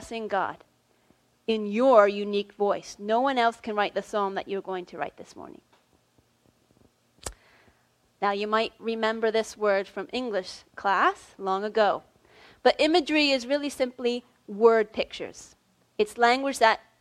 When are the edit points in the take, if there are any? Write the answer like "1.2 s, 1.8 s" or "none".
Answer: 8.0 s